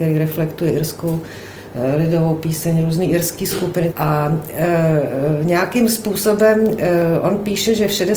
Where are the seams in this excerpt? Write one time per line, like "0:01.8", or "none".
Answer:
0:03.9